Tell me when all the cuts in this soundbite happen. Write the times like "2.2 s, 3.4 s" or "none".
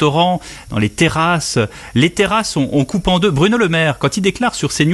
none